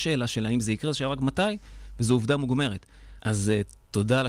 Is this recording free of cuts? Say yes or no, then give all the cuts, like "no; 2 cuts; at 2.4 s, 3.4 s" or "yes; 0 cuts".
no; 1 cut; at 3.2 s